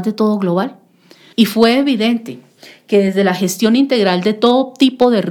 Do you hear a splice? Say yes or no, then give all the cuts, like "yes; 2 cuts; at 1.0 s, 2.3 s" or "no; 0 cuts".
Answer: yes; 1 cut; at 1.3 s